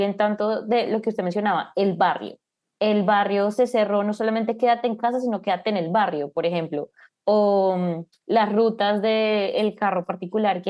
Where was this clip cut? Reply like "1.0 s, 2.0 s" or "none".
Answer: none